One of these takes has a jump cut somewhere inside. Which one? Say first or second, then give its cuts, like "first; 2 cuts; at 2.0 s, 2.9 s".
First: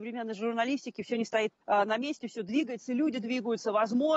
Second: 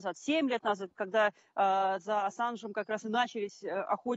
first; 1 cut; at 1.6 s